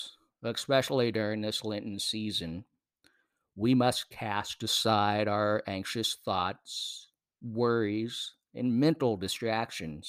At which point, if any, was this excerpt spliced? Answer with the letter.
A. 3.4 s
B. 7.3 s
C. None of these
C